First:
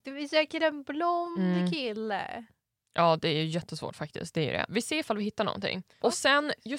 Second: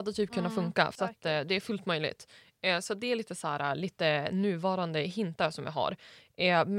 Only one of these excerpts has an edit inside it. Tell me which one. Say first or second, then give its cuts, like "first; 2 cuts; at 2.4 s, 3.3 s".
first; 1 cut; at 4.7 s